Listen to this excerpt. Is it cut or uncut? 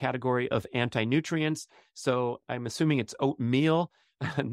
uncut